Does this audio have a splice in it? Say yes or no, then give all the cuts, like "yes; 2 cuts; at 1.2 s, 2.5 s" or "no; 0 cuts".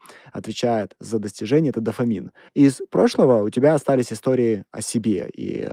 yes; 1 cut; at 2.5 s